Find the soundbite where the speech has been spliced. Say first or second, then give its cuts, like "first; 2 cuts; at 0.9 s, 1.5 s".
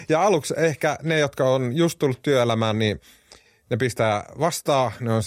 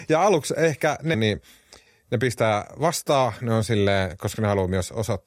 second; 1 cut; at 1.1 s